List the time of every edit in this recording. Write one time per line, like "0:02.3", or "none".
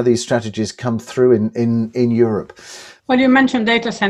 0:03.0

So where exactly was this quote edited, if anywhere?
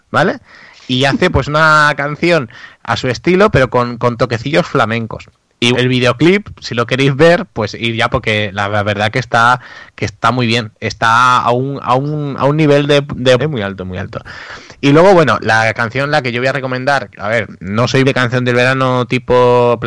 0:05.7
0:13.4
0:18.0

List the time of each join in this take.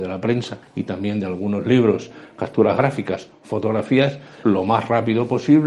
0:04.4

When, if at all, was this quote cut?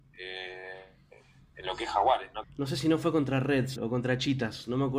0:02.4
0:03.8

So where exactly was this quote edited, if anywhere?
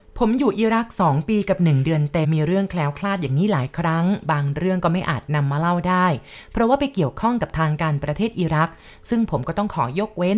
0:02.2

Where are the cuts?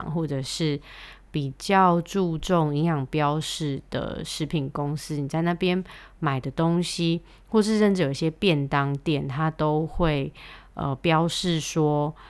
none

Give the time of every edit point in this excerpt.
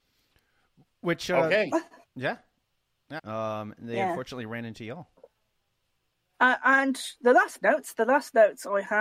0:03.2

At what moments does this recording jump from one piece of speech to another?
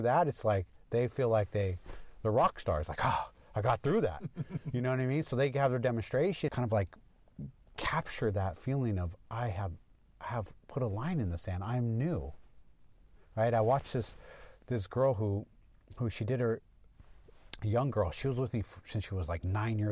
0:06.5

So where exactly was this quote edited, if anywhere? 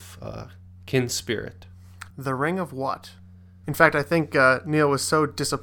0:02.1
0:03.6

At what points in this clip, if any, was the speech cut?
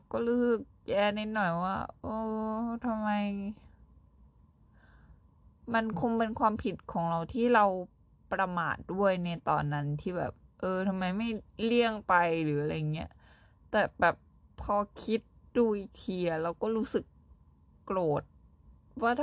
none

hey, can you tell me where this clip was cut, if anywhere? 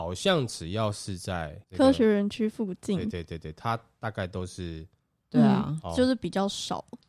0:05.2

